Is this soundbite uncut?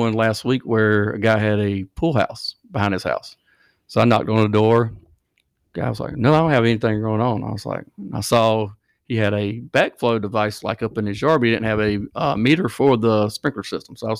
yes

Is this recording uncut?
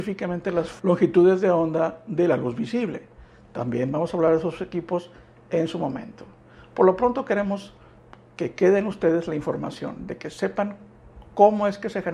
yes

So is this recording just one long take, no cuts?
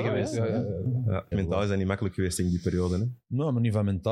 no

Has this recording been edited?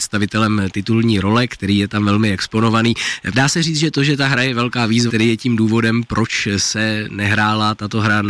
yes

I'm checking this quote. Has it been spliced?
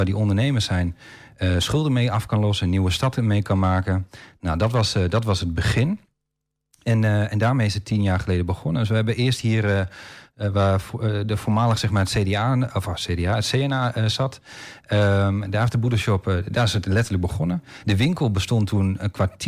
no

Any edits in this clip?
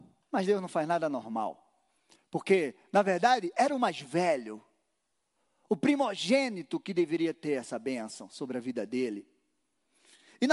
no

